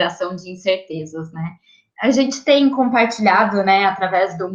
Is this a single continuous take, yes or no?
no